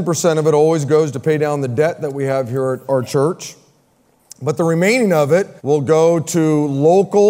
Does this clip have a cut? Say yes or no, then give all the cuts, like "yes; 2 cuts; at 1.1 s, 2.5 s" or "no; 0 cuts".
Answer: yes; 1 cut; at 5.6 s